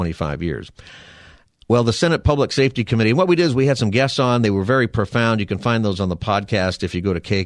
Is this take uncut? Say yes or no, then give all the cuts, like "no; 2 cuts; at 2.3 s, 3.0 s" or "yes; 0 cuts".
yes; 0 cuts